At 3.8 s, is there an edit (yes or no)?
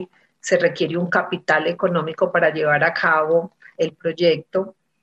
yes